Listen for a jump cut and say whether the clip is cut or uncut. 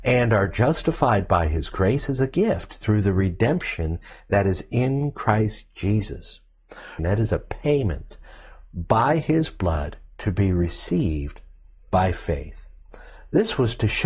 cut